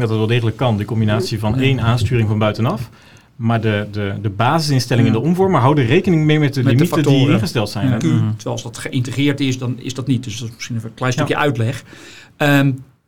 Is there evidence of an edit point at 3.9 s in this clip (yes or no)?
no